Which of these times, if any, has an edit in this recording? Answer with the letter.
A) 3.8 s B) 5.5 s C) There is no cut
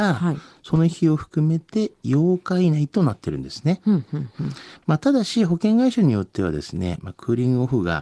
C